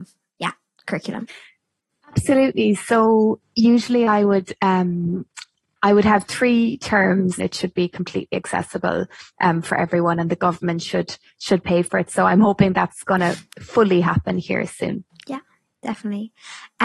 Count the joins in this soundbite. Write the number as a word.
one